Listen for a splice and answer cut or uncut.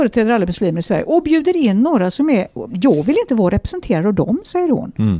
cut